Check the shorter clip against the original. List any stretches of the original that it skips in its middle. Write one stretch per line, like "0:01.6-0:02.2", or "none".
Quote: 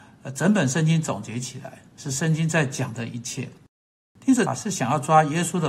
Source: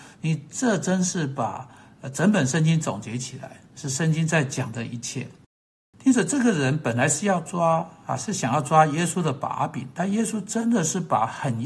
0:06.2-0:08.1